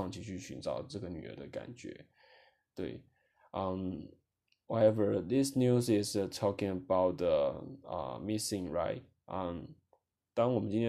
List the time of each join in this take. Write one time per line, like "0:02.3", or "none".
none